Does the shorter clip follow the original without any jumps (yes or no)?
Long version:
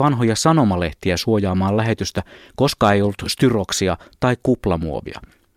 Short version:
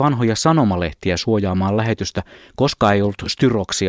yes